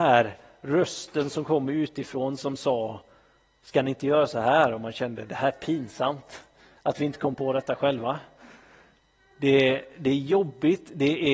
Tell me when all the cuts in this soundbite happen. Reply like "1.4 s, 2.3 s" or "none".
none